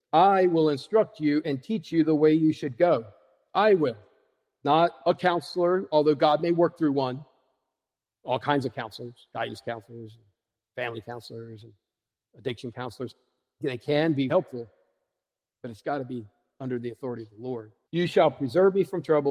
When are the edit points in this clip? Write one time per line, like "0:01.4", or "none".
0:14.3
0:17.8